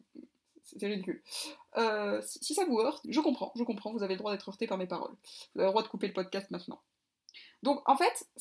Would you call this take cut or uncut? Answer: cut